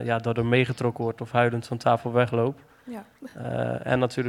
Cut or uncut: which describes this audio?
uncut